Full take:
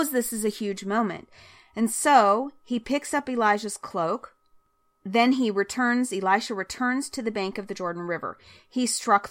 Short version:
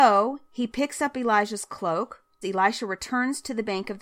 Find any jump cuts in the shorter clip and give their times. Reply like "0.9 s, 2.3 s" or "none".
2.4 s